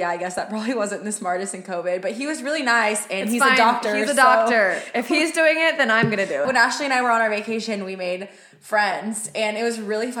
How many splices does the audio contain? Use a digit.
1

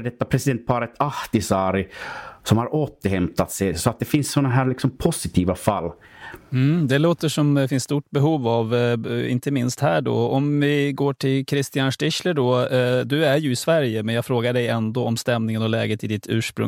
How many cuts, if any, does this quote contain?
1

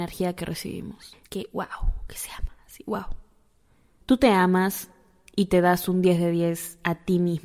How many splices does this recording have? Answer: 2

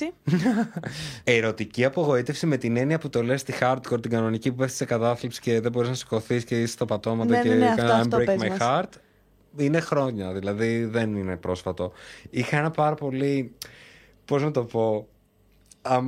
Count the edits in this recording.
0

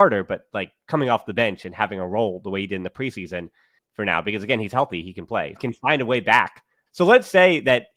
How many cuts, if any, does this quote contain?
2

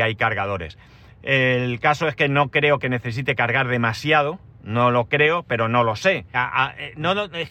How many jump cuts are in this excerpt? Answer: 1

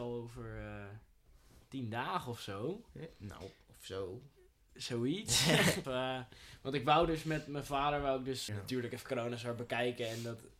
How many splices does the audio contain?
2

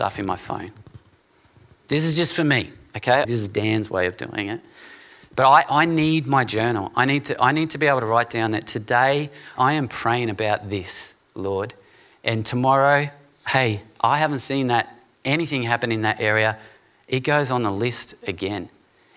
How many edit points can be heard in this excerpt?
2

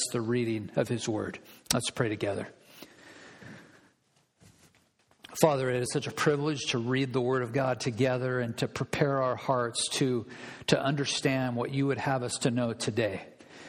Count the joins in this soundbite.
1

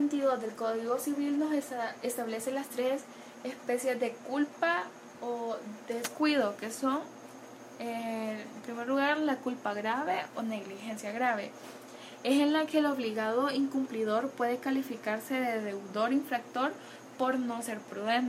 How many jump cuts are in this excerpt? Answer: 0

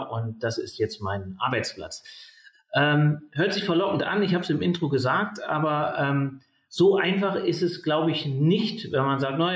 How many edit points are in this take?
1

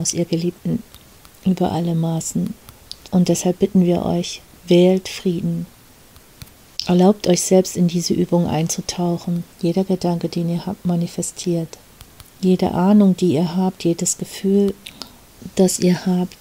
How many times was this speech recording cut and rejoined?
2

